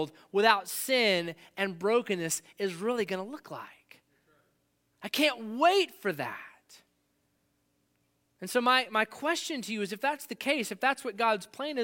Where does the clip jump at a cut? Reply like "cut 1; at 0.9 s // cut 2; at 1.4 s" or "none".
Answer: none